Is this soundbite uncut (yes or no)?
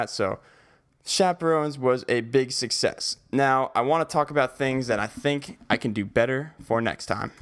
yes